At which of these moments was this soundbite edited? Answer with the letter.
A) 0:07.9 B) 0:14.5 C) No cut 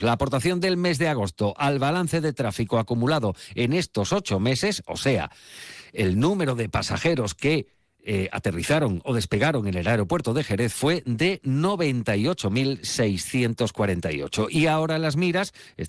C